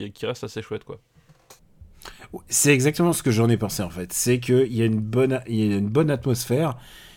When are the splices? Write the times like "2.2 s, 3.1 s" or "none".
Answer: none